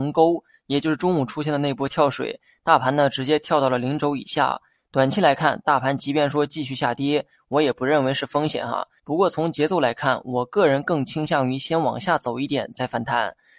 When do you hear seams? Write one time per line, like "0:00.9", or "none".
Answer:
0:09.0